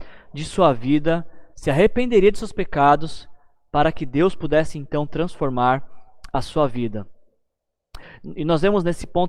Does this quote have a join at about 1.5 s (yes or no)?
yes